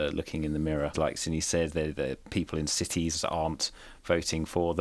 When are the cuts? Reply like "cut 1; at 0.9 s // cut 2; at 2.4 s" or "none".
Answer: cut 1; at 0.9 s